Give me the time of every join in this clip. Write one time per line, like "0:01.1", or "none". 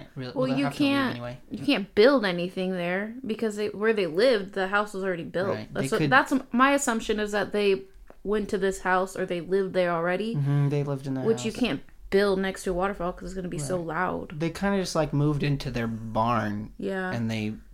none